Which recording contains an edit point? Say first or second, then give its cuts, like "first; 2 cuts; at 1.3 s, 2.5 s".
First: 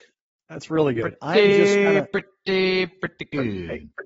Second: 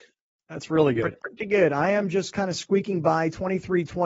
second; 1 cut; at 1.2 s